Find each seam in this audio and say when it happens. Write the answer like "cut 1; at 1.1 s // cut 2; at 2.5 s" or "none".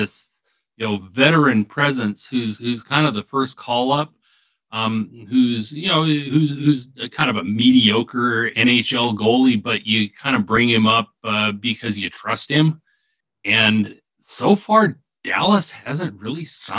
none